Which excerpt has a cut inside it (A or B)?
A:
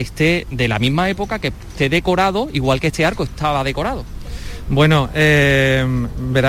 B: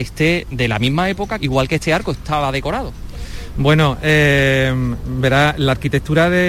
B